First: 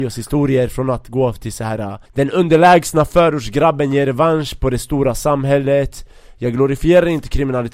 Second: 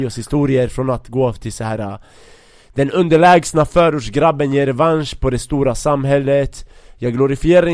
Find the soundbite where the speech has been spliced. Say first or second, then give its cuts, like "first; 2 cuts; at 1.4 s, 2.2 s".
first; 1 cut; at 2.1 s